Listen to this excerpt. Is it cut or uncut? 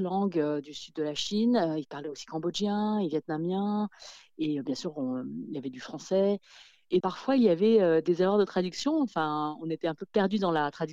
cut